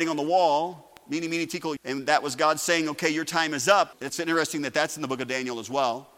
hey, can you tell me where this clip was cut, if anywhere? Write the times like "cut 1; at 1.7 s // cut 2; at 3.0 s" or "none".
cut 1; at 1.8 s // cut 2; at 3.9 s